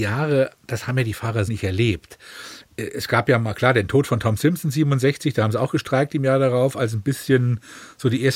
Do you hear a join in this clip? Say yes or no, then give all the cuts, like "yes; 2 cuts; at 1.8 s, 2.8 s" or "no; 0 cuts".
yes; 1 cut; at 1.5 s